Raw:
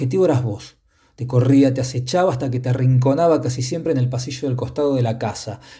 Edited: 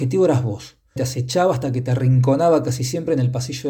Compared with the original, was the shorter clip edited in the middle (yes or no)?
yes